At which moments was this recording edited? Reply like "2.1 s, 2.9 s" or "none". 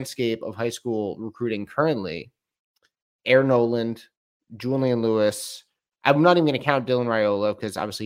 none